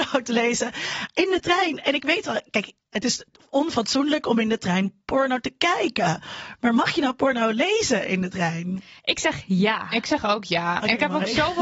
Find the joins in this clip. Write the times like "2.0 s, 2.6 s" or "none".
none